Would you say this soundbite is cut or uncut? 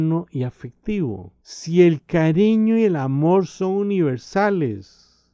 uncut